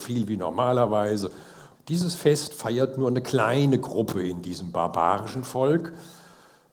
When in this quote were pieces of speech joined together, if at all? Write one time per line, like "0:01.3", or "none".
0:01.8